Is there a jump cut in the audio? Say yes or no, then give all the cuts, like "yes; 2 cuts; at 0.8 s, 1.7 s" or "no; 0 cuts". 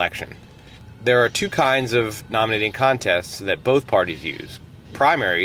no; 0 cuts